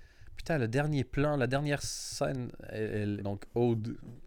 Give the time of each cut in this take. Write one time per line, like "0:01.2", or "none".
0:03.2